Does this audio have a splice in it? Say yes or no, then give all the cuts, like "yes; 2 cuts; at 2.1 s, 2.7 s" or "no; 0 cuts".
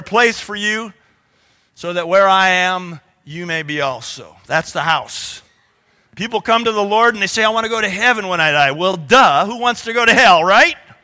no; 0 cuts